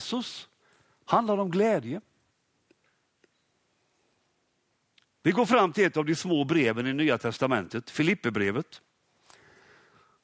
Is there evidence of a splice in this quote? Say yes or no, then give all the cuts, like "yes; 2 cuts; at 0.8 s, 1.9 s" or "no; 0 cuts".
no; 0 cuts